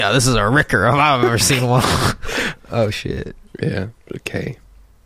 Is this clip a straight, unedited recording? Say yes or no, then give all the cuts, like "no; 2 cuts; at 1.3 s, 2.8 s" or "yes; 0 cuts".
no; 1 cut; at 2.6 s